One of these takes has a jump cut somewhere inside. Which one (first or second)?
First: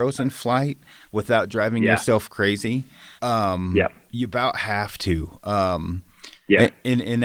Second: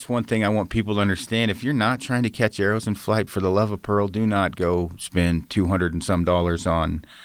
first